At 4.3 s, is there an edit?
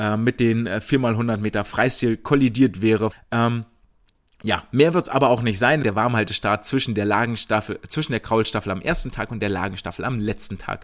no; 2 cuts; at 3.1 s, 5.8 s

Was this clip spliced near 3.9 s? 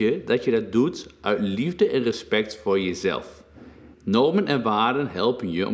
yes; 1 cut; at 3.9 s

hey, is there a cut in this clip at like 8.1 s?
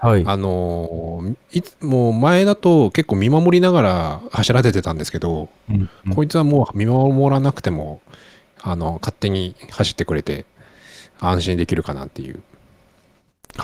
no; 0 cuts

